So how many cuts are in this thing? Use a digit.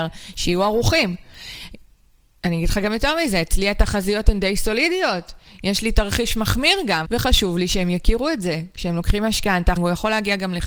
2